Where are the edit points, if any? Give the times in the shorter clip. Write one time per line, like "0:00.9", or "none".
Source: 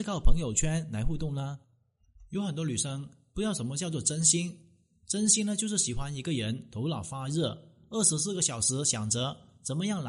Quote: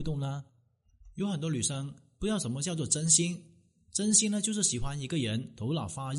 none

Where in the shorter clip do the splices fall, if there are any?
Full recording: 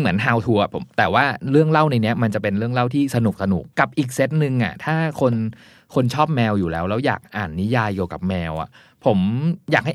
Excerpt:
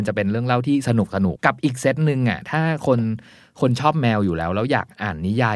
0:01.4

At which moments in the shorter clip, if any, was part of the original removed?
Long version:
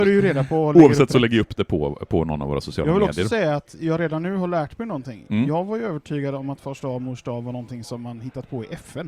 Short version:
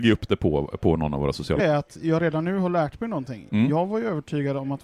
0:01.6

